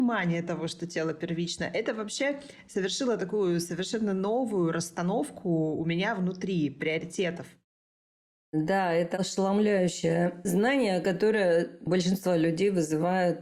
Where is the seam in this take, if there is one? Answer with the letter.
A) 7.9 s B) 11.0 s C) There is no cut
C